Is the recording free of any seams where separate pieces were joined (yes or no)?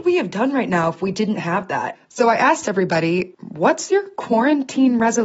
no